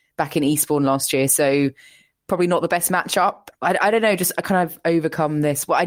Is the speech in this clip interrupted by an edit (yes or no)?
yes